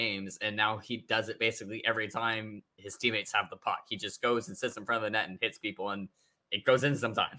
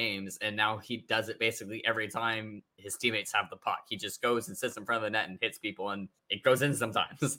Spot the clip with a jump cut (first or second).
second